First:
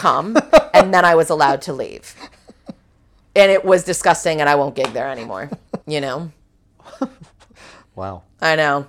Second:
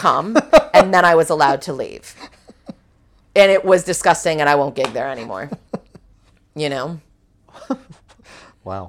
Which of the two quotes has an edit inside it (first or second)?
first